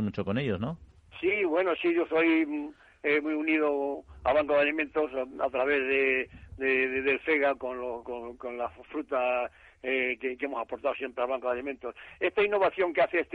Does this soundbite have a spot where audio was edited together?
yes; 1 cut; at 8.0 s

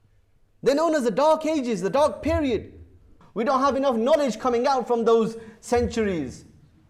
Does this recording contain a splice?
yes; 1 cut; at 3.2 s

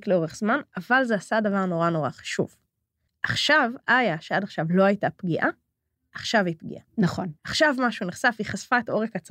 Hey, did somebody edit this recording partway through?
no; 0 cuts

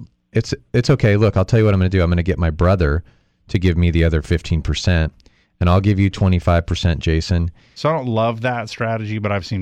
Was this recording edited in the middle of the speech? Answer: yes; 1 cut; at 7.8 s

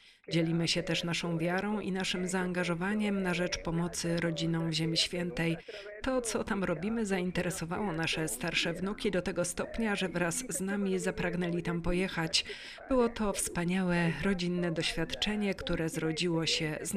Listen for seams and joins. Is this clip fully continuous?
yes; 0 cuts

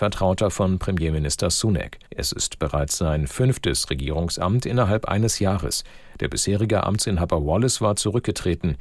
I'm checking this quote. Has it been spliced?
yes; 1 cut; at 2.1 s

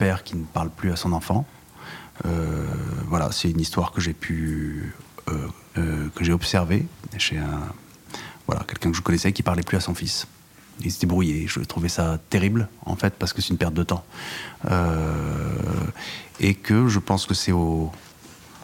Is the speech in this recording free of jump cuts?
no; 1 cut; at 5.7 s

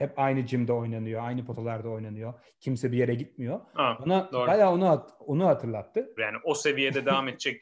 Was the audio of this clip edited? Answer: yes; 1 cut; at 6.2 s

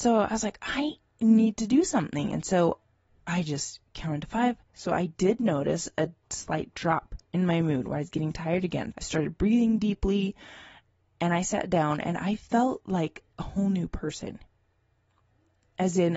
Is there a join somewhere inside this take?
yes; 3 cuts; at 4.7 s, 7.2 s, 8.9 s

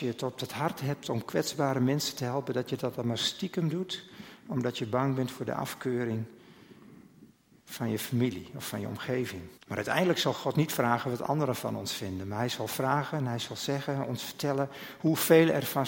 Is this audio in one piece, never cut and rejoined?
no; 1 cut; at 9.6 s

